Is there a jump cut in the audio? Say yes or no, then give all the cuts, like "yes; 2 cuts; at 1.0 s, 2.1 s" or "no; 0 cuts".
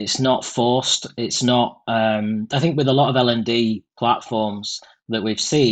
no; 0 cuts